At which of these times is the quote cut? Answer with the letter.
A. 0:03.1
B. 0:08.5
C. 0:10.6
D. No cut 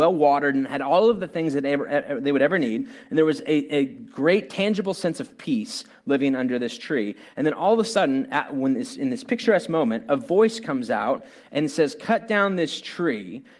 D